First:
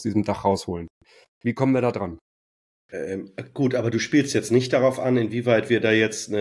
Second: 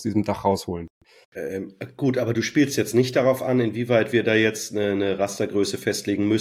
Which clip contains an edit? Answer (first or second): second